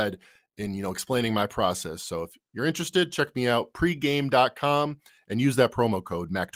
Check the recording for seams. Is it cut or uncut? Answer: uncut